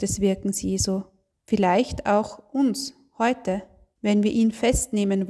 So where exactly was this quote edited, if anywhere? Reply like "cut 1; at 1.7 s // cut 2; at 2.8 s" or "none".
cut 1; at 1.3 s